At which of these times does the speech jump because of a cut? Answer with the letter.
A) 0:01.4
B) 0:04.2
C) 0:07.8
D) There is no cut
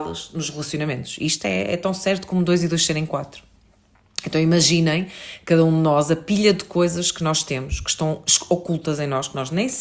D